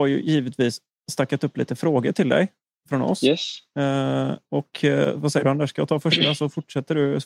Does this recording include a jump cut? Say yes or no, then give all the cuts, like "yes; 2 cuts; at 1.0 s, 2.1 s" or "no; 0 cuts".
no; 0 cuts